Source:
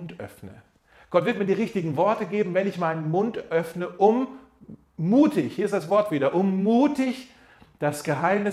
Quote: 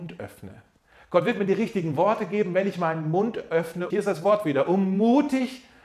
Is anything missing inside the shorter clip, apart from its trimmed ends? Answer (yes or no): yes